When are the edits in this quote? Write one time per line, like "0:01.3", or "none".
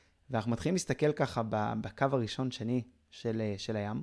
none